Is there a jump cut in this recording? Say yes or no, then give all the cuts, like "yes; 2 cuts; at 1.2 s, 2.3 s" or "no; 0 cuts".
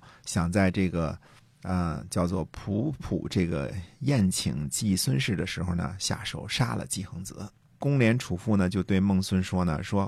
yes; 2 cuts; at 3.0 s, 7.8 s